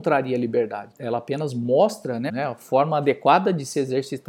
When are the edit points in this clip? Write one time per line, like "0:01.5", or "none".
0:00.9
0:02.3